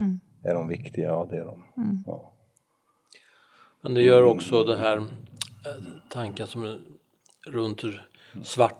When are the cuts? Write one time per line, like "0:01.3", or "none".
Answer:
none